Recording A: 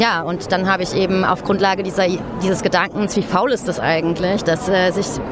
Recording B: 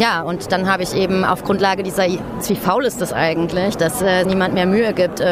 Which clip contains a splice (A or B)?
B